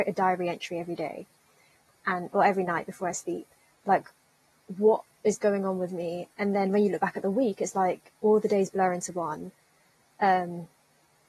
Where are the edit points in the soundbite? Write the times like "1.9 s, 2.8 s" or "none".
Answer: 3.7 s